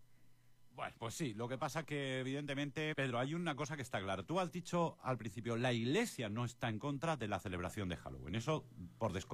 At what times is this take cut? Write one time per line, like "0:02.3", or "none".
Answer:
0:02.9

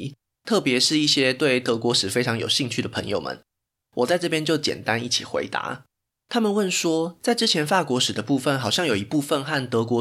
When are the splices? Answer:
none

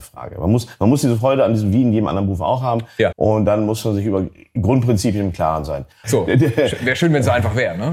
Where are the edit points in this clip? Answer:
0:03.1
0:06.0

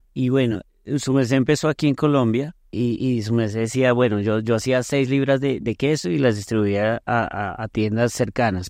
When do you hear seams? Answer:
0:02.7

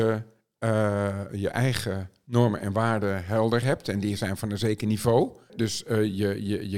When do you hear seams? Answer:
0:01.3
0:05.5

